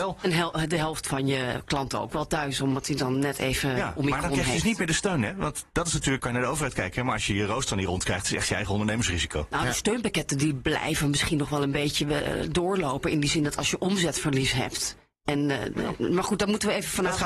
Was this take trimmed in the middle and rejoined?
yes; 1 cut; at 6.2 s

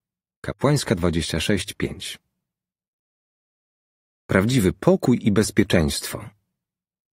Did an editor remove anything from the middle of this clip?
no; 0 cuts

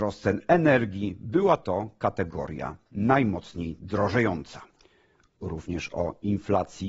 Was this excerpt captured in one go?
yes; 0 cuts

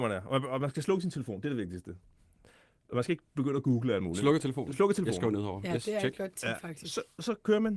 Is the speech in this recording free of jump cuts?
yes; 0 cuts

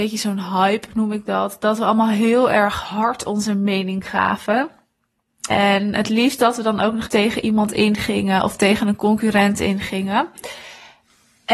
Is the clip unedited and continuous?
no; 2 cuts; at 5.5 s, 7.1 s

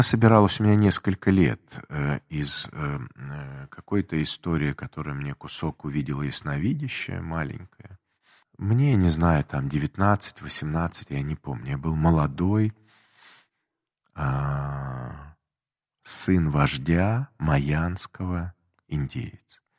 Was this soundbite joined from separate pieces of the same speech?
yes; 2 cuts; at 8.4 s, 11.1 s

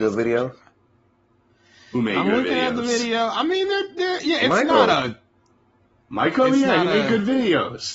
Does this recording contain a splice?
no; 0 cuts

